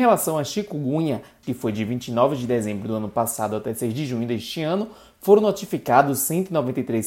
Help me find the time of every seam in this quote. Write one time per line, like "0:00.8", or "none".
0:01.4